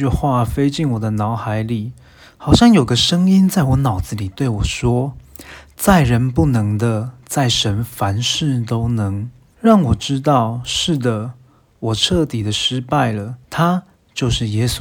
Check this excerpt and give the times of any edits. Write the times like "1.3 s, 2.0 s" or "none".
9.5 s, 13.4 s